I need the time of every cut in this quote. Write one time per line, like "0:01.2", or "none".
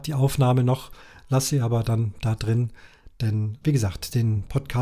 0:03.6

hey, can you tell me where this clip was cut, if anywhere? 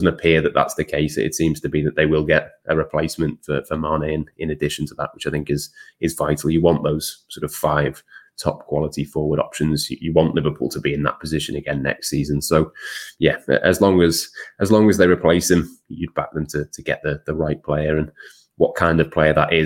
none

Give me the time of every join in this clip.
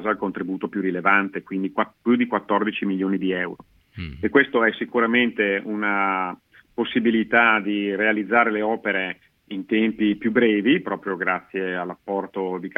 none

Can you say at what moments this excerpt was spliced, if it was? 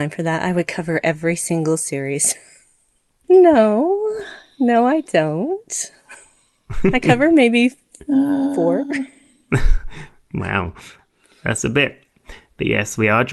0:03.2

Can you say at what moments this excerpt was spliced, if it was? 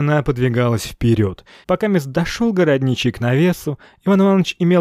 0:01.6

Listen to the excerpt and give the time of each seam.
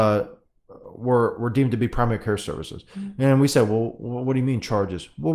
none

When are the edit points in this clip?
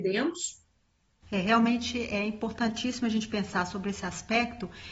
0:01.2

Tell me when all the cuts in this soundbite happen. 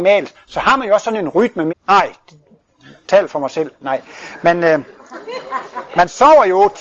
0:01.7

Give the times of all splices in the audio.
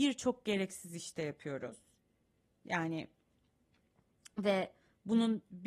none

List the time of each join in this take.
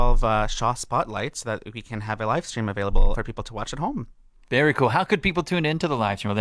0:03.1

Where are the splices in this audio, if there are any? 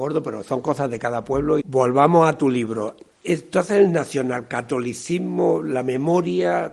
0:01.6

